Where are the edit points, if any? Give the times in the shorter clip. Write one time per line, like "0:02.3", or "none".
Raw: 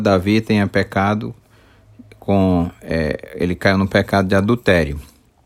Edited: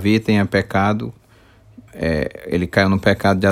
0:01.9